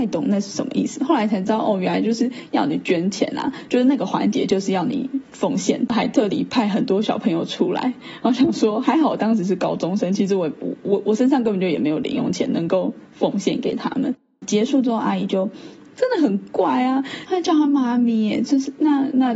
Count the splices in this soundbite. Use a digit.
2